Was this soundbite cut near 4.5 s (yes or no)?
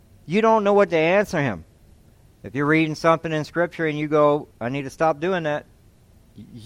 yes